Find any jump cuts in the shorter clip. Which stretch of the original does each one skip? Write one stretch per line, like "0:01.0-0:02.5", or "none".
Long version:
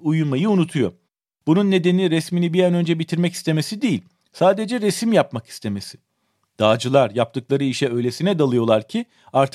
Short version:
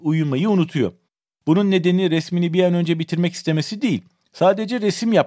none

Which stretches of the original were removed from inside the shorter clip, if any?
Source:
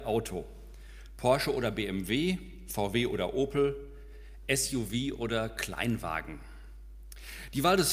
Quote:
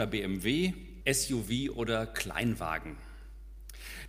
0:02.7-0:04.4

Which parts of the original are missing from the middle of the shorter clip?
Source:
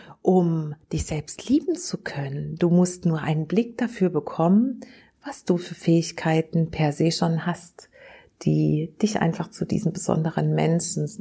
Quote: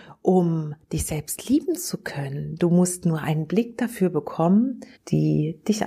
0:05.0-0:08.3

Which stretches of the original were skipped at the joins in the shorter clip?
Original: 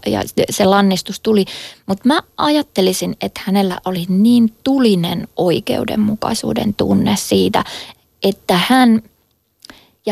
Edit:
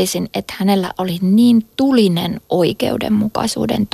none

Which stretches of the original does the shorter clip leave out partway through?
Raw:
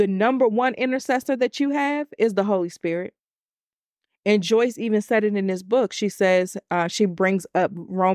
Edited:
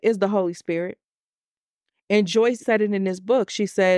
0:04.8-0:05.0

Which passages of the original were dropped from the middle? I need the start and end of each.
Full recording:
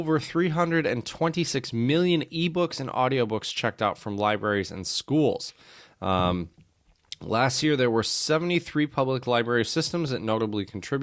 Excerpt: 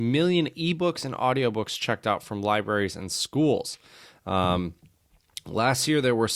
none

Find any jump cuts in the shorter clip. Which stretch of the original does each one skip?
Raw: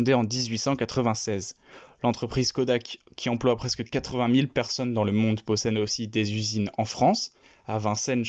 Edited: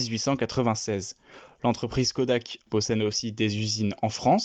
0:03.1-0:05.4

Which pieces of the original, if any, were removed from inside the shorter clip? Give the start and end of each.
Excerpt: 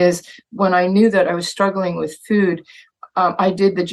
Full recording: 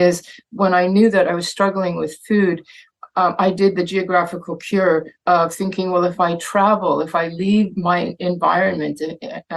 none

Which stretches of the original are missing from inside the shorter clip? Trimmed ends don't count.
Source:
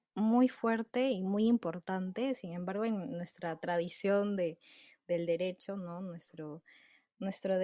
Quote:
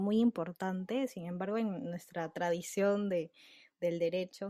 none

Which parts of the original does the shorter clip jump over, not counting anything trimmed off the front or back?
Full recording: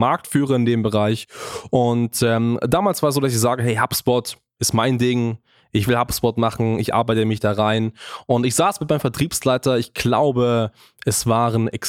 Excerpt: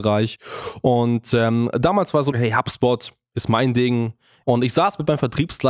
0:03.2-0:03.6
0:05.7-0:08.3

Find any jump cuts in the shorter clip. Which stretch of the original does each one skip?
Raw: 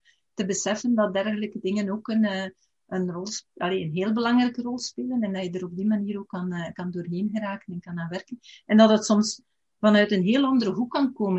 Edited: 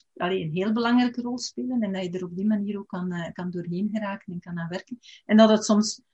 none

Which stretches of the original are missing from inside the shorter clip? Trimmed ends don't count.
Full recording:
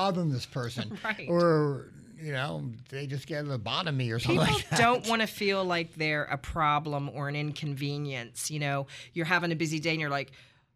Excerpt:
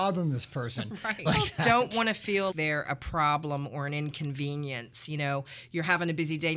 0:01.3-0:04.4
0:05.6-0:05.9

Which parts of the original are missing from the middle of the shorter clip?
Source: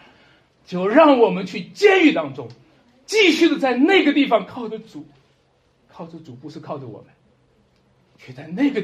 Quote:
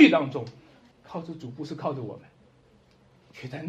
0:02.9-0:05.8

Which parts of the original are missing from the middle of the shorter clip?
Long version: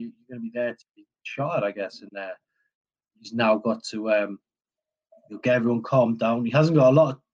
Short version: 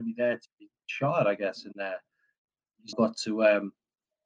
0:03.3-0:03.6

